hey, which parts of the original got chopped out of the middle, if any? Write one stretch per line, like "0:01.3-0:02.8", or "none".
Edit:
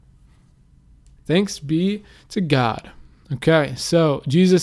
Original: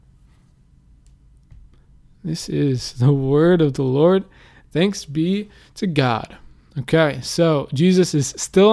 0:01.2-0:04.6